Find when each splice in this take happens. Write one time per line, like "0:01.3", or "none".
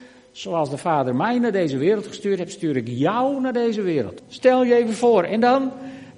0:04.2